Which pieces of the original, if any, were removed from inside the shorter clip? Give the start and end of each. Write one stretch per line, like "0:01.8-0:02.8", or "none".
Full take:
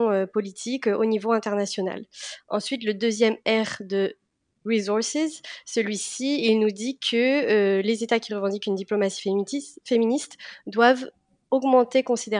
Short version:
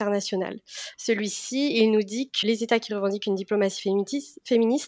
0:02.4-0:05.6
0:07.1-0:07.8